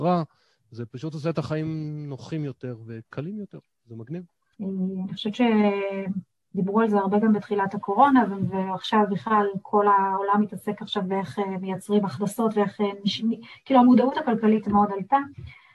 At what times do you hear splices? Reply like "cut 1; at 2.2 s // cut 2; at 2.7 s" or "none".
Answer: cut 1; at 4.5 s